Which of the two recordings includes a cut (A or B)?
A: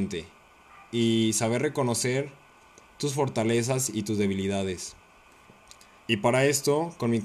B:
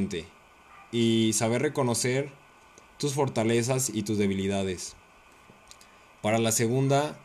A